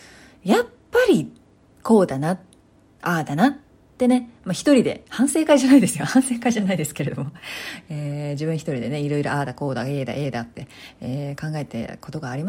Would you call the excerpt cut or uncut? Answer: uncut